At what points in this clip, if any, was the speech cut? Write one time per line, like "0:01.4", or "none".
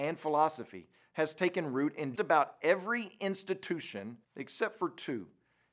0:02.2
0:04.2